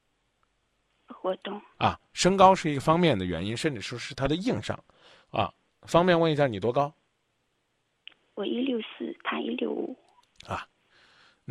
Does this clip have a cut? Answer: no; 0 cuts

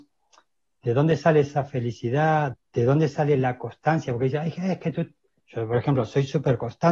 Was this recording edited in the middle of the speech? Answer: yes; 1 cut; at 2.5 s

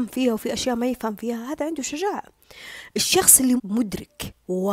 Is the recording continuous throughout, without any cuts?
no; 1 cut; at 3.6 s

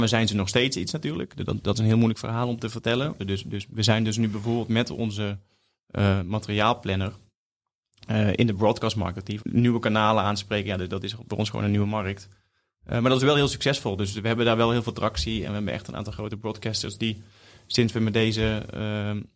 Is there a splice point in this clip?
yes; 2 cuts; at 3.2 s, 9.4 s

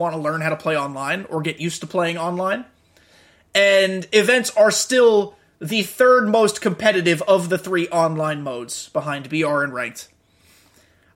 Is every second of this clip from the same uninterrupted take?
yes; 0 cuts

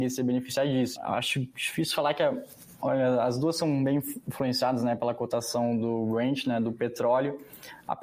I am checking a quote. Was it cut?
yes; 1 cut; at 1.0 s

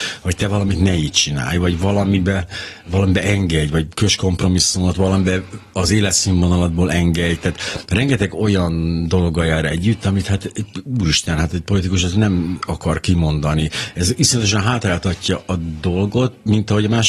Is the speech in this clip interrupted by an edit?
no; 0 cuts

